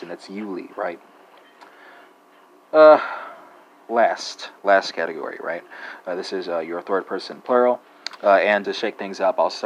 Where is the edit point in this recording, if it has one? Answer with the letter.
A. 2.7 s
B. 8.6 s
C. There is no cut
B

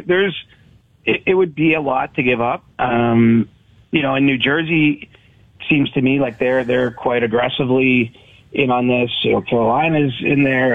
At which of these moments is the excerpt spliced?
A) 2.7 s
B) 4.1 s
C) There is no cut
A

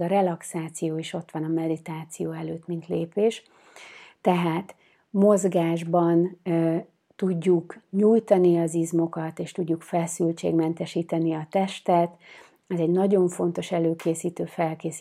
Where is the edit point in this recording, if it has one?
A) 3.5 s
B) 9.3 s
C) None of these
C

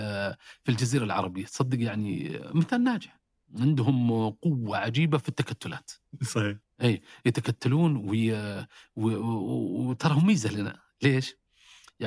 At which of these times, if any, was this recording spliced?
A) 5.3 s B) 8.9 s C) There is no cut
C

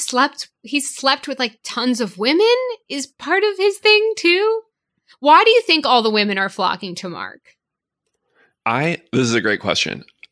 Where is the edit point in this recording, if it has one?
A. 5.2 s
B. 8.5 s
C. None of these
C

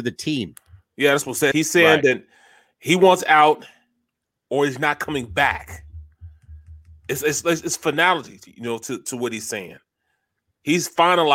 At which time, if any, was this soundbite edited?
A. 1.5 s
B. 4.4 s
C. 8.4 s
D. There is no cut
A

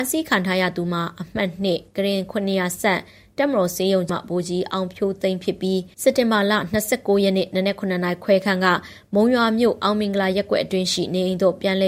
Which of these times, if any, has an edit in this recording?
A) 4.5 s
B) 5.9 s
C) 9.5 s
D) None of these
B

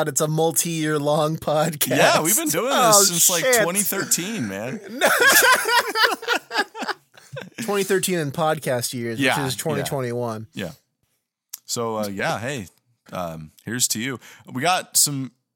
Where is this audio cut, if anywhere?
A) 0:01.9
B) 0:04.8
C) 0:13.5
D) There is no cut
C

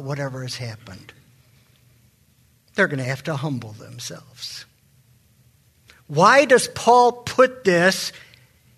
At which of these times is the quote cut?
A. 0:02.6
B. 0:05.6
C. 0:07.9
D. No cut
D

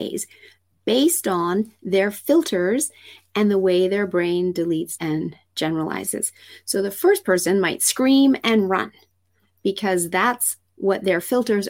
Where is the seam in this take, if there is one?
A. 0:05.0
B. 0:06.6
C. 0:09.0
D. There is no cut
A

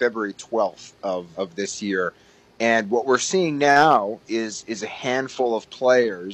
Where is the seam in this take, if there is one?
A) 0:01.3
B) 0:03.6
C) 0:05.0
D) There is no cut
A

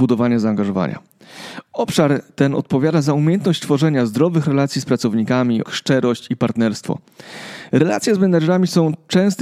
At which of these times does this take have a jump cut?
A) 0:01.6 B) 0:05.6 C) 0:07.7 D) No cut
B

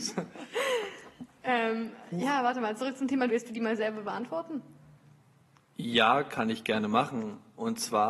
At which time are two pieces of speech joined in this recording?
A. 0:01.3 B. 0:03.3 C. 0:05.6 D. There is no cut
B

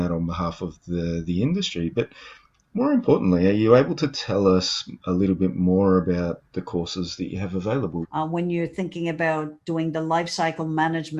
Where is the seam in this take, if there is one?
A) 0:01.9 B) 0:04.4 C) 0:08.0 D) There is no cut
C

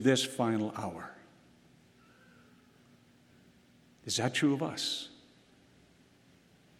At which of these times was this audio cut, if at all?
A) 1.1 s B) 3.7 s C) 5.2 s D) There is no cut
D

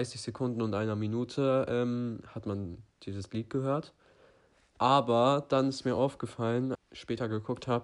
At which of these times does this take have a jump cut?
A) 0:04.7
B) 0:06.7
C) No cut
B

